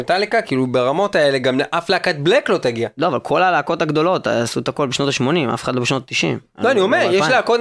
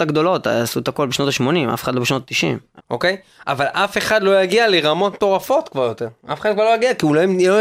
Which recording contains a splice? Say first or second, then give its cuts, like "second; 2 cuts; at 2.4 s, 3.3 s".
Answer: second; 1 cut; at 2.8 s